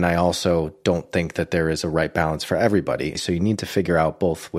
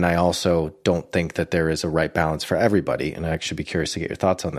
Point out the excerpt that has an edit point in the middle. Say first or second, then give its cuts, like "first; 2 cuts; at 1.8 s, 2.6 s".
first; 1 cut; at 3.1 s